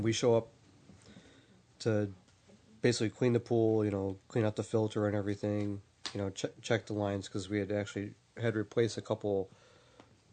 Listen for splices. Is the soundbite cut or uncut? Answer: uncut